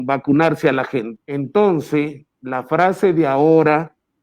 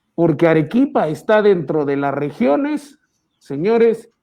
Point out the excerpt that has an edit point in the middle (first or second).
first